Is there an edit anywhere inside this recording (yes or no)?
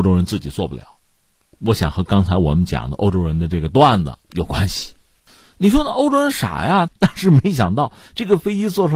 yes